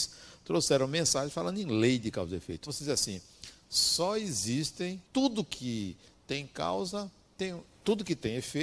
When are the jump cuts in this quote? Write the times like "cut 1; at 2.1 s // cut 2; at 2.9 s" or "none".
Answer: cut 1; at 2.7 s // cut 2; at 5.1 s